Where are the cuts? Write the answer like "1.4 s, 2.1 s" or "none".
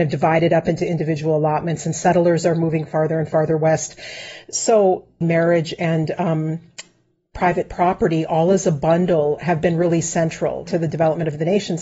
5.2 s, 10.7 s